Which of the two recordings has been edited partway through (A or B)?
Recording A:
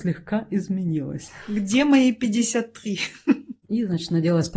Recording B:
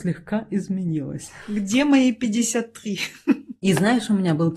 A